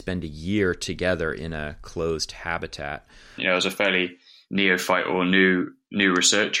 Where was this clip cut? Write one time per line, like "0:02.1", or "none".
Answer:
0:03.4

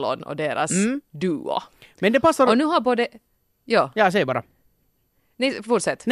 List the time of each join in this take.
none

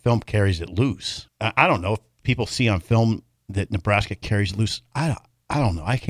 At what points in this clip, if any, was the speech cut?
0:01.3

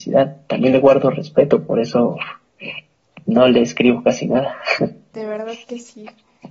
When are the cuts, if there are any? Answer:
0:05.1

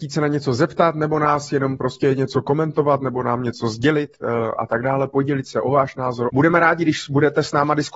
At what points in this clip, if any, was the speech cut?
0:06.3

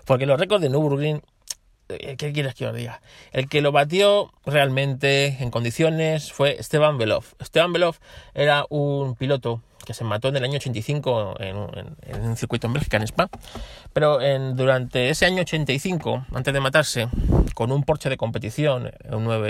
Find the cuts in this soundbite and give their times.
0:04.4

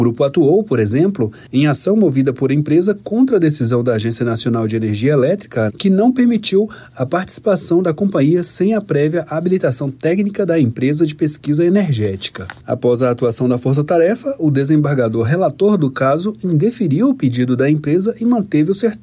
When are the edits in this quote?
0:05.7

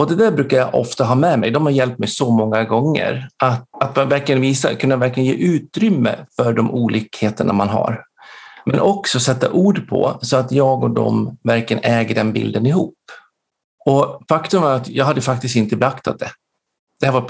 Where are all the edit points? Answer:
0:03.7
0:13.8

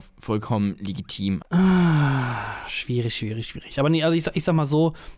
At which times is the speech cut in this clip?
0:01.4

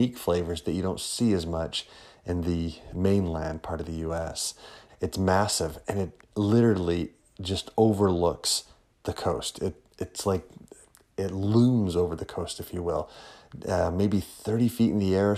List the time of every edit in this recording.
0:04.9

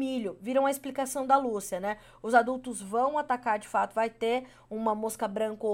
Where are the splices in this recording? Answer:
none

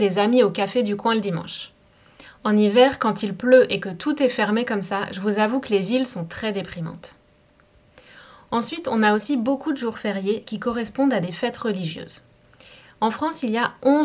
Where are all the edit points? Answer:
none

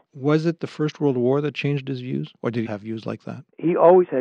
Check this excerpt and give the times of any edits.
0:02.7

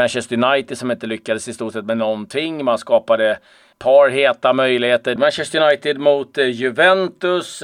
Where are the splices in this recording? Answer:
0:03.7
0:05.2

